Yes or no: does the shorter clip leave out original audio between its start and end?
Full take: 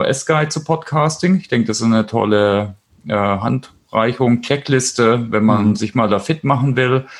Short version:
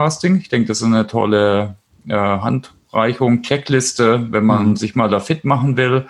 no